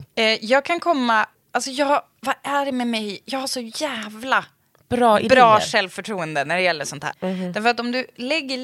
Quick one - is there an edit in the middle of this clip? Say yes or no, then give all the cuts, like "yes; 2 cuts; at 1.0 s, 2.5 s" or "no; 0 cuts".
yes; 1 cut; at 7.1 s